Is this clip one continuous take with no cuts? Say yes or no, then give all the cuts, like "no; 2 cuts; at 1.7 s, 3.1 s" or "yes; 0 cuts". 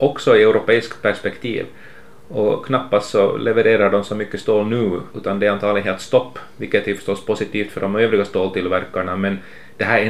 no; 1 cut; at 5.1 s